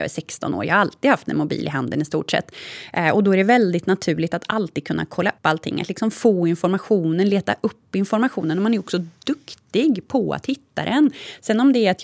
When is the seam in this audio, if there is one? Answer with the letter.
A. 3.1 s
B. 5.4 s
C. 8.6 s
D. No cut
B